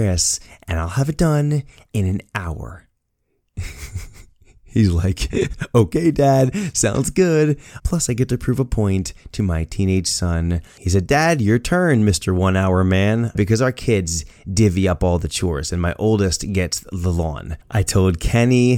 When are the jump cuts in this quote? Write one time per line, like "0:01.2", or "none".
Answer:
0:07.8
0:10.8
0:13.3